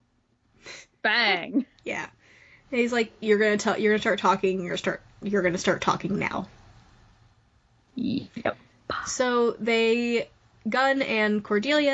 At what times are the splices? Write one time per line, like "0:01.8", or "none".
none